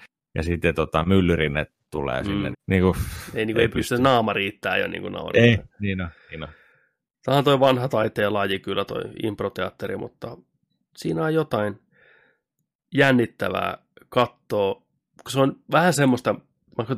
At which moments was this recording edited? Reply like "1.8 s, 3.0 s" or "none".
2.5 s